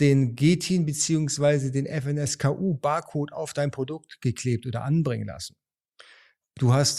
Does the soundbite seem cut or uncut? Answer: uncut